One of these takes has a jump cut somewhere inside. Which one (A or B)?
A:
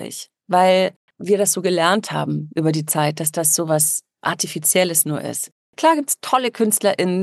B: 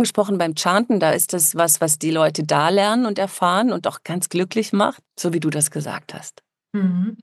B